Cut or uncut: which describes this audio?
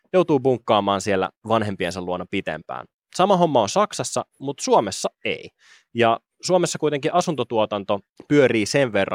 uncut